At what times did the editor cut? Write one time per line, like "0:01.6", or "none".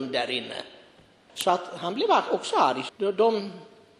0:01.3
0:02.9